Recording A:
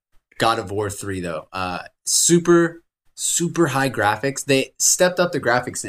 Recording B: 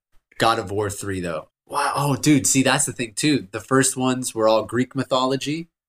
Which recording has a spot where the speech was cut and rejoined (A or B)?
B